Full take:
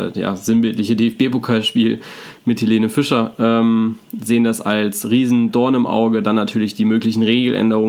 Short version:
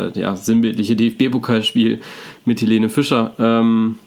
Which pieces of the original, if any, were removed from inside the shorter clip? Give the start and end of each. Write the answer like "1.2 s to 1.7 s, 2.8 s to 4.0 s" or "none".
none